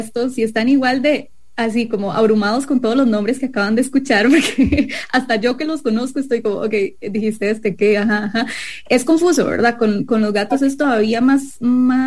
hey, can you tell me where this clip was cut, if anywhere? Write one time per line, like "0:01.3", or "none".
none